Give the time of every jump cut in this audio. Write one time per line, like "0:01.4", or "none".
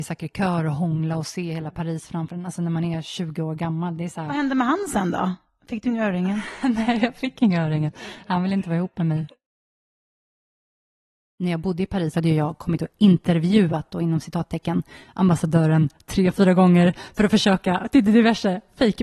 none